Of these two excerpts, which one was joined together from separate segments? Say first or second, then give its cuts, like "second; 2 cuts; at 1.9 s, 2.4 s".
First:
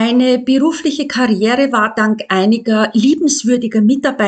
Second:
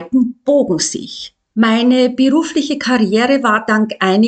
second; 1 cut; at 1.5 s